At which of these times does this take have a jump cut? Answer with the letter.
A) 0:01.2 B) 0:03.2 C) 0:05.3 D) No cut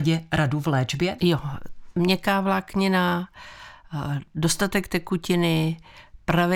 A